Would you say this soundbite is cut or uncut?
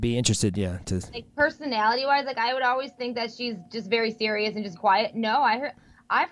cut